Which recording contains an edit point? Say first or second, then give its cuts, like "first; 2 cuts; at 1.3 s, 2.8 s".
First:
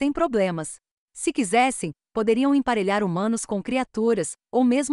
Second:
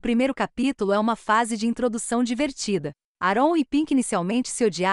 first; 1 cut; at 1.0 s